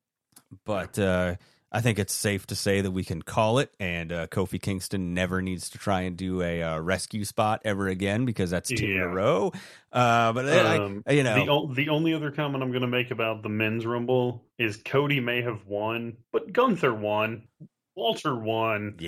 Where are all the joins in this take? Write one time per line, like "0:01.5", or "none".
0:14.5
0:16.2
0:17.5